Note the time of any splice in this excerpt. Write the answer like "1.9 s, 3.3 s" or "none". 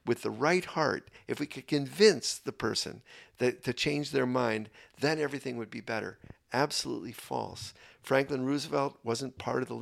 none